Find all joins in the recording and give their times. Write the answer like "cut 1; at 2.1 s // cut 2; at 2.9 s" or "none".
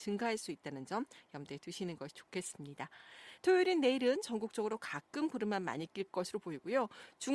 cut 1; at 3.4 s